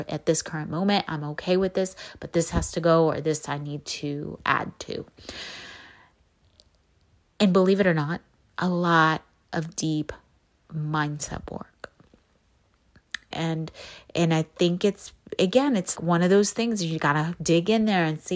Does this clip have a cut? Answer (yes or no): yes